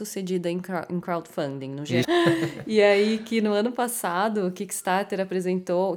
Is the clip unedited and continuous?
no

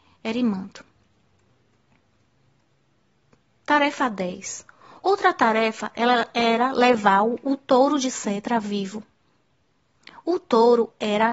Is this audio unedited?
yes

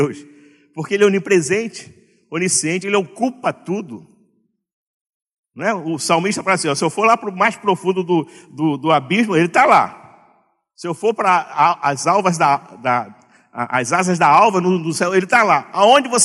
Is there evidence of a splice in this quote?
yes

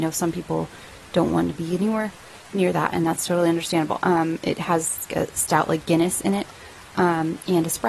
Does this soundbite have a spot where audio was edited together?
yes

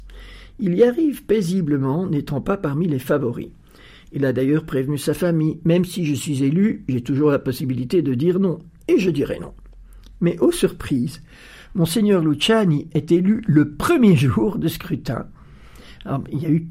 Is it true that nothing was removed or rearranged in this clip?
yes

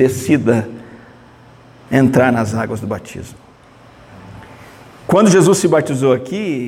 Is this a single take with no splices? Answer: yes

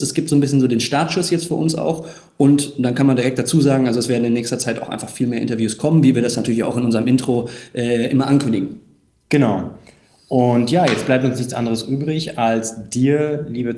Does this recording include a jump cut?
no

